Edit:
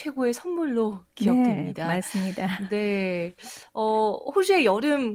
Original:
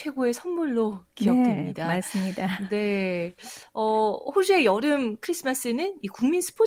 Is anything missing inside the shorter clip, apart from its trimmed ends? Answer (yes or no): no